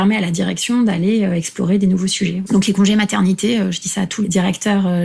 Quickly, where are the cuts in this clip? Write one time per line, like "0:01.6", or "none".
0:02.4